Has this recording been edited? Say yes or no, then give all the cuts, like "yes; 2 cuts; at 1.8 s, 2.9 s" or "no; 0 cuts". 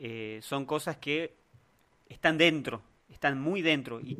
no; 0 cuts